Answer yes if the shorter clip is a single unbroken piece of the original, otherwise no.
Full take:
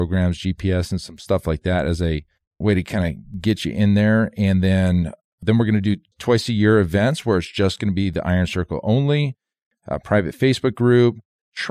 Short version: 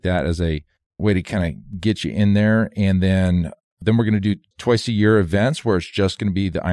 yes